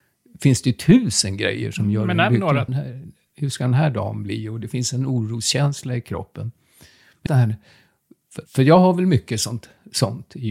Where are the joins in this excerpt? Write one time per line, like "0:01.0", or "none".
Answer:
0:02.7
0:07.3
0:08.5